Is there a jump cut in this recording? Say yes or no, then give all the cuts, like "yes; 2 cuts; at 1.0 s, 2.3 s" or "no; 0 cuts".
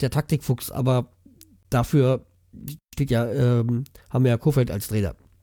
no; 0 cuts